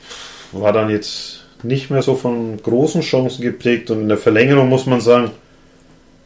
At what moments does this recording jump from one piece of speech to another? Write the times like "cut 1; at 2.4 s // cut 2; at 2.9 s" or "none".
none